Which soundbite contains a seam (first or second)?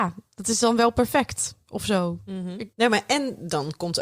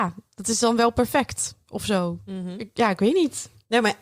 first